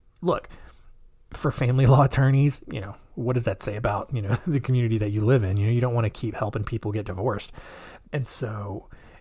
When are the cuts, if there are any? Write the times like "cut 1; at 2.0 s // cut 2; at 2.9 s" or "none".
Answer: cut 1; at 2.6 s // cut 2; at 8.0 s